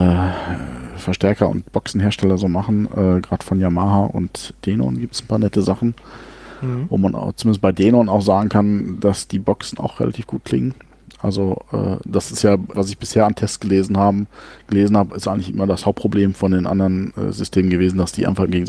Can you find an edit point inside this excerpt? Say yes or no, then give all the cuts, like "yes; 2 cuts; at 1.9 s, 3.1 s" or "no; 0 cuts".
yes; 1 cut; at 12.7 s